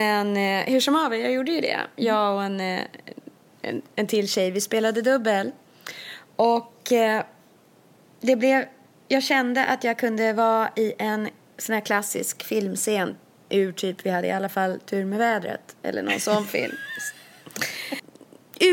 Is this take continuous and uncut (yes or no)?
yes